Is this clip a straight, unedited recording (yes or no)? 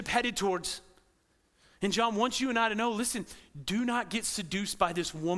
yes